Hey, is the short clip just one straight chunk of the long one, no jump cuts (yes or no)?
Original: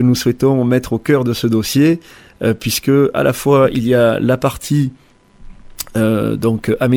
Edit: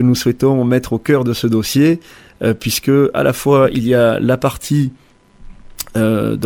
yes